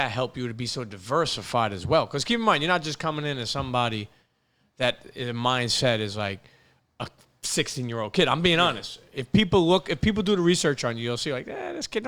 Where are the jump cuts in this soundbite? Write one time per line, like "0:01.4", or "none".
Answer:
none